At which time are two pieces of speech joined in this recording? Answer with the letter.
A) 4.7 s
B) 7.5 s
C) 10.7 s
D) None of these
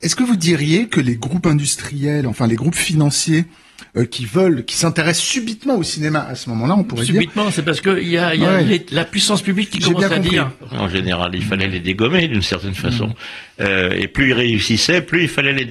C